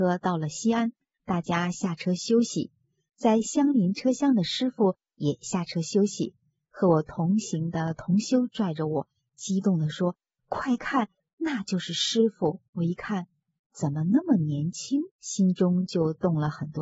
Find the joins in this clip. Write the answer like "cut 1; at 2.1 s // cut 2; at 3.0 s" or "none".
cut 1; at 12.7 s // cut 2; at 15.1 s